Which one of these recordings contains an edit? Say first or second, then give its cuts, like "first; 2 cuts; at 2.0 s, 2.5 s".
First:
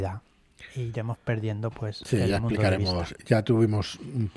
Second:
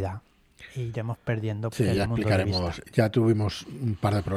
second; 1 cut; at 1.7 s